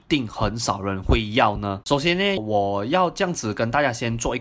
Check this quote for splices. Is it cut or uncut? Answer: cut